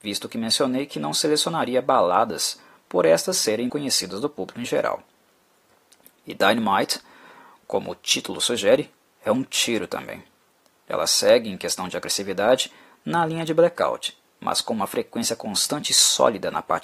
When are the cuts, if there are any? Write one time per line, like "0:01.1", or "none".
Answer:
0:03.7

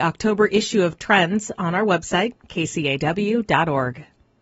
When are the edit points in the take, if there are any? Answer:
none

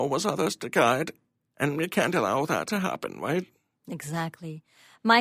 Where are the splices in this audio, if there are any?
0:01.5

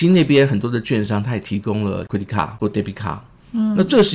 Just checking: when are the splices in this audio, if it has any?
none

